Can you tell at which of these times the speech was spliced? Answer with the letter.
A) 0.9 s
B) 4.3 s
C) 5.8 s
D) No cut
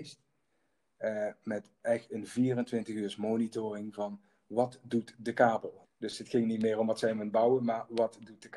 C